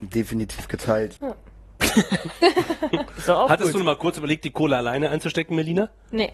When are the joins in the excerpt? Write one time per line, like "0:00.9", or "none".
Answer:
0:01.1

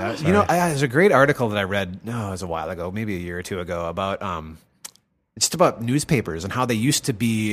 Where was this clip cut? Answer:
none

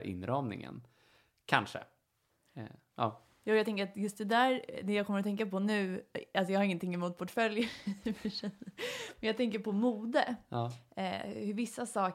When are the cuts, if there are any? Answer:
none

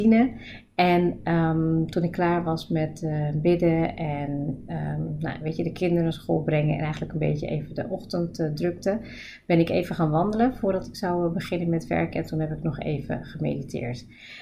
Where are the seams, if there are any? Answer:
none

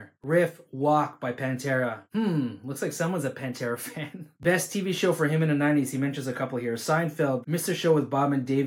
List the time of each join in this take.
0:07.4

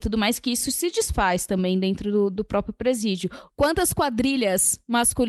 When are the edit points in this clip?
0:03.5

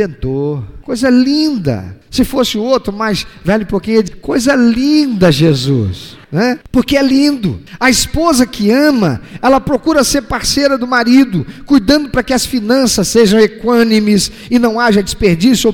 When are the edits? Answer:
0:04.1

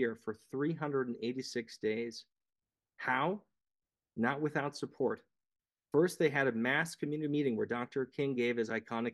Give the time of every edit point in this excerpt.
none

